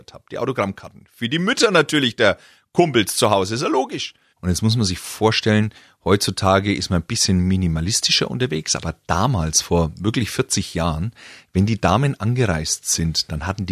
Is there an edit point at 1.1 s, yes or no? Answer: no